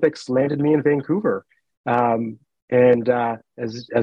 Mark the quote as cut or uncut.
uncut